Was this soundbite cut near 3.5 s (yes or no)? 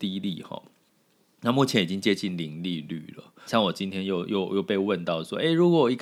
yes